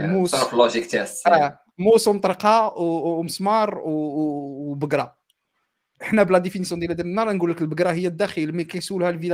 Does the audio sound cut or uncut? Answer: uncut